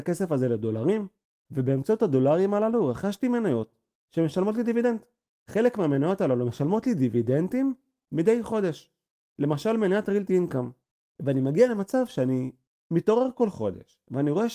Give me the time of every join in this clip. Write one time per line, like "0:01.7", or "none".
none

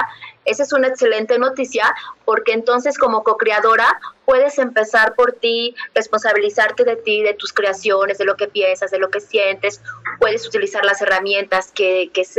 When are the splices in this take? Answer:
none

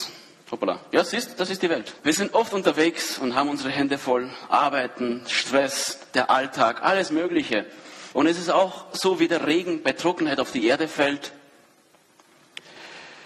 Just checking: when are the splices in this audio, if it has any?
0:02.0
0:08.1

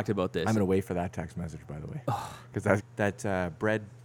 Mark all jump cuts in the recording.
0:02.8

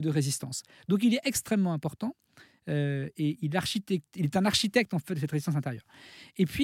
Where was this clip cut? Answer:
none

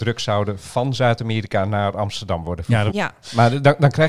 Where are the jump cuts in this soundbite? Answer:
0:02.9

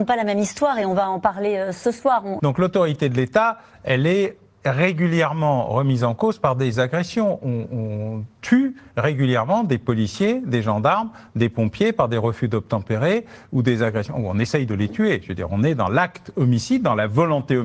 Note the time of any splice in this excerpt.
0:02.4

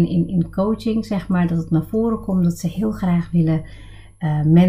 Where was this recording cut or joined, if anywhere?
none

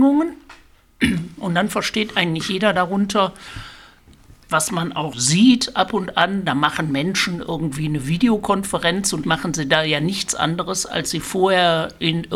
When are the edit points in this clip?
0:05.1
0:09.2

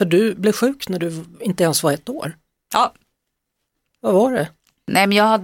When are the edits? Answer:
none

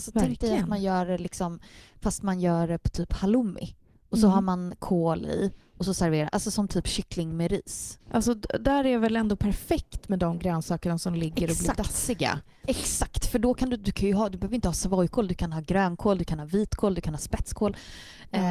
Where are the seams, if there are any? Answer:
0:08.0

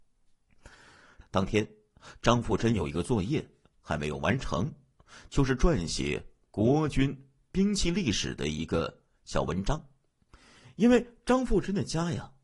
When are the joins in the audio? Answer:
0:01.2

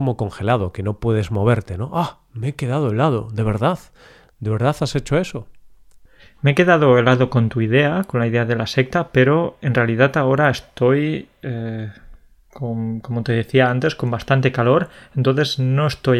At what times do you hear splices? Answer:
none

